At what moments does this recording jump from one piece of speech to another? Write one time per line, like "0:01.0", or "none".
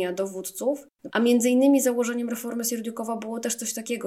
0:01.1

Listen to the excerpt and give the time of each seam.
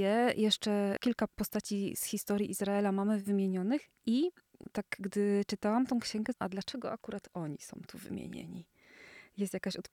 0:06.3

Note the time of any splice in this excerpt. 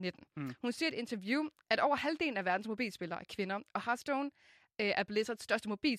none

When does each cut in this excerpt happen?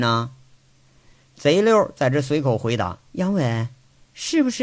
0:03.1

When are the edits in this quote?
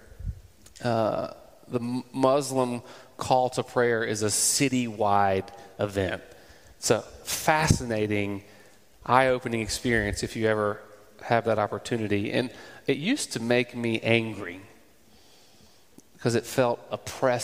none

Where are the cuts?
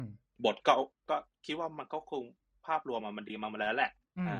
none

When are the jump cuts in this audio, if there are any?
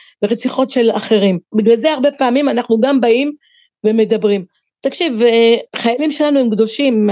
0:01.5

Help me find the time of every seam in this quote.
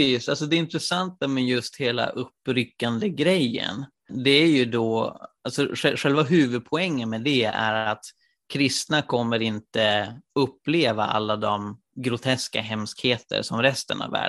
none

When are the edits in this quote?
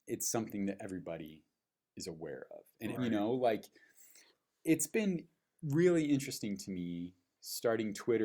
0:03.0

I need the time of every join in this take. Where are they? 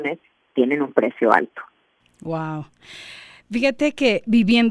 none

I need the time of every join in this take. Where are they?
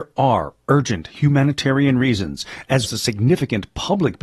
0:02.8

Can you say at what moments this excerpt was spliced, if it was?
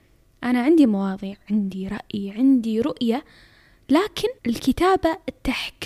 0:04.4

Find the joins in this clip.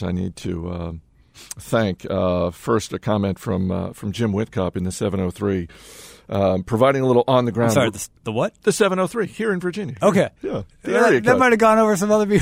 none

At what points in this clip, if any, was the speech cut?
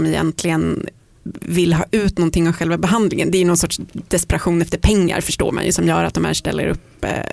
none

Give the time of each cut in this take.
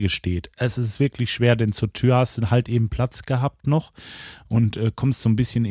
none

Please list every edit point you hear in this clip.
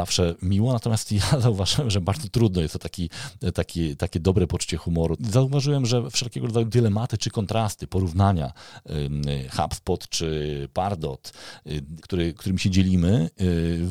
0:05.2
0:12.0

